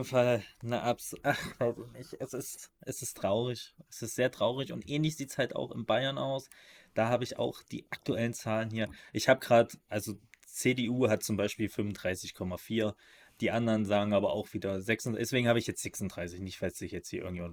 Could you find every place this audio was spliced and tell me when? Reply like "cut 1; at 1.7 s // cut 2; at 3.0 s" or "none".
none

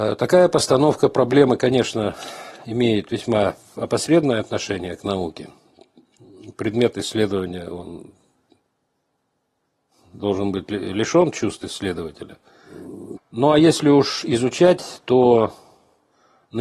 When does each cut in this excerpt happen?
cut 1; at 13.2 s

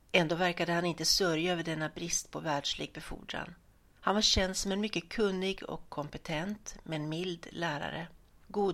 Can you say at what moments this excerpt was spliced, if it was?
none

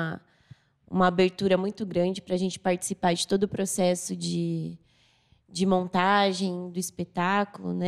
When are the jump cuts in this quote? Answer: none

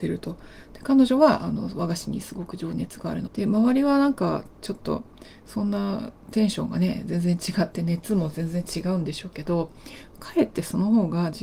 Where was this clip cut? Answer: cut 1; at 3.3 s

